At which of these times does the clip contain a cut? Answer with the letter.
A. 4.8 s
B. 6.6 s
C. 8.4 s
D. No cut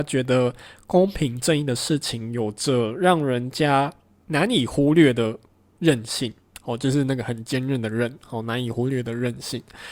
D